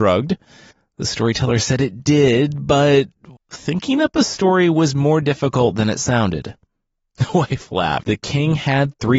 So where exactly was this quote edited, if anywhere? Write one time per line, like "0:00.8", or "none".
0:03.4
0:08.0